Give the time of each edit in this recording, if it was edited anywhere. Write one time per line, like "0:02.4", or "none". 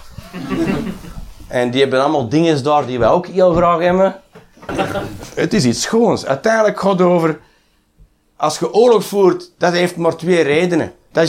0:04.7